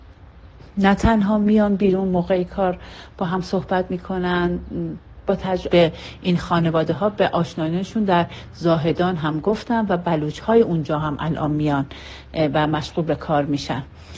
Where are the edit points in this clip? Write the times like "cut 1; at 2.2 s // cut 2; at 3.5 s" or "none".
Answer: cut 1; at 5.7 s